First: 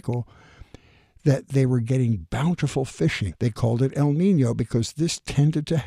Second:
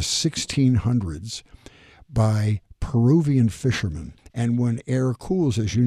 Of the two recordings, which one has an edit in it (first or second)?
second